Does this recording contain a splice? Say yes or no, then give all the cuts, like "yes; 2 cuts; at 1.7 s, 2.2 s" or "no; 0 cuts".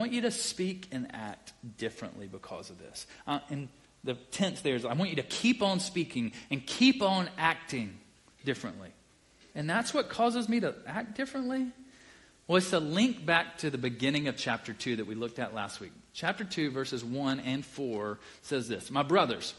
yes; 1 cut; at 9.5 s